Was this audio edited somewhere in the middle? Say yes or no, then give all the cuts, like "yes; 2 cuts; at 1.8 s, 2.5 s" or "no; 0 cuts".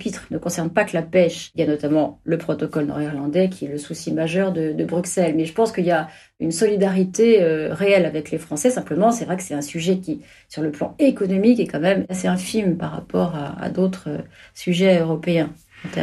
no; 0 cuts